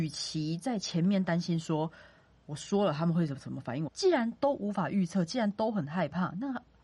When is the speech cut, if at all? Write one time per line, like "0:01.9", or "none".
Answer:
0:03.9